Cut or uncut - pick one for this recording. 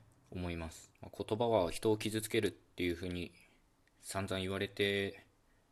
cut